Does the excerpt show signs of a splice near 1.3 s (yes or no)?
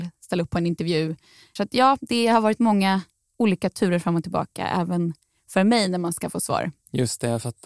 no